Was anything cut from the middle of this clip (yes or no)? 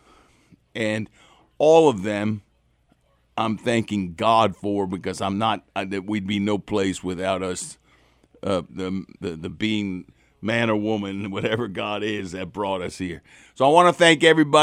yes